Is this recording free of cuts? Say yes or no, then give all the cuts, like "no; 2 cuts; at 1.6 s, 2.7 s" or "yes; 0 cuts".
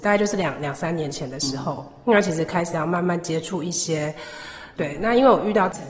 no; 1 cut; at 4.8 s